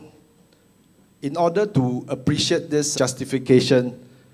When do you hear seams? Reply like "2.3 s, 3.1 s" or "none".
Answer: 2.9 s